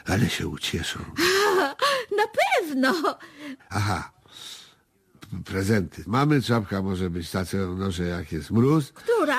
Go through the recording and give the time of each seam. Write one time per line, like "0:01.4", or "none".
0:03.6
0:06.1